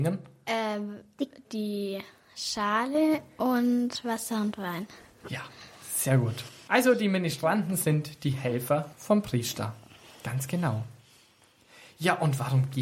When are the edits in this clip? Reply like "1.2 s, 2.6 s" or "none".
1.4 s